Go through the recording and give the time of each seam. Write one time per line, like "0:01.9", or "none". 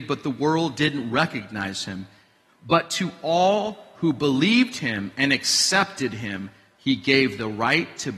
0:02.5